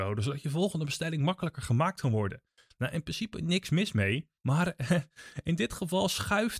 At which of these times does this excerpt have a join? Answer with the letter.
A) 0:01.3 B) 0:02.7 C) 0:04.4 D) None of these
C